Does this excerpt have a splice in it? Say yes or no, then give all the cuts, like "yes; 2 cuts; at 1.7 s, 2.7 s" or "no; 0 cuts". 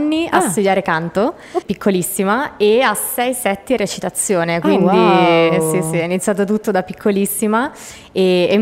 yes; 1 cut; at 1.6 s